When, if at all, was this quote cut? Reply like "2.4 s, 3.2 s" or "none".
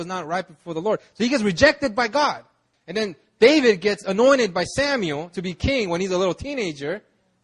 2.7 s

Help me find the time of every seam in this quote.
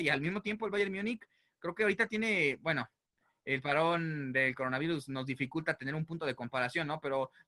none

